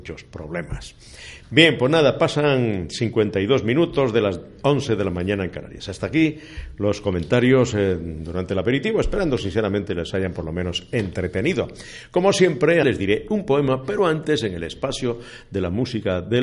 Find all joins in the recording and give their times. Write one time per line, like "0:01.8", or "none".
0:12.8